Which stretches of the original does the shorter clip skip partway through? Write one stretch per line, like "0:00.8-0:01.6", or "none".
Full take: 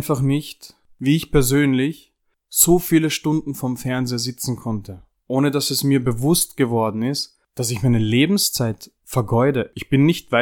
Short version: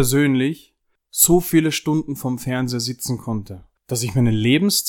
0:05.1-0:07.4